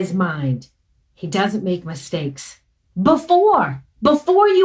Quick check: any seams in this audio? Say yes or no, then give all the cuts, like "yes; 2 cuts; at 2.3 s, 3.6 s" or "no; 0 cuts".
yes; 1 cut; at 2.8 s